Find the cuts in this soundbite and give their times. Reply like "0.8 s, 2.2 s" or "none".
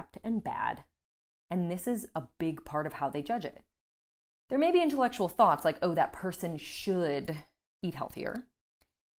1.4 s